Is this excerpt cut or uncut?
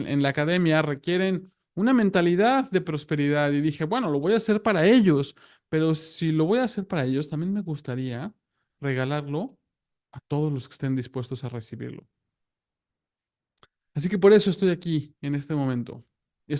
uncut